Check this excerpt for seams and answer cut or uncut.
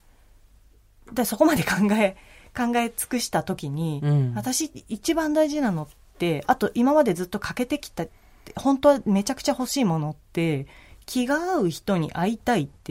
uncut